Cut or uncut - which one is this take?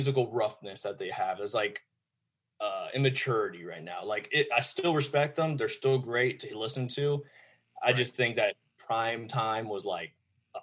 uncut